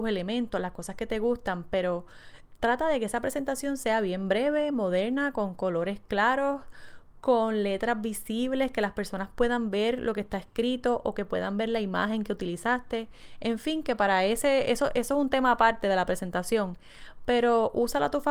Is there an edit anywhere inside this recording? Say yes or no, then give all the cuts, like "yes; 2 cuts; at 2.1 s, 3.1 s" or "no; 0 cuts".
no; 0 cuts